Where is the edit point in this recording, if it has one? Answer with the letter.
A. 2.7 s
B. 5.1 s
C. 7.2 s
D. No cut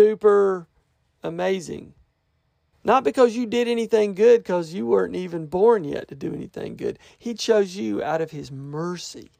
A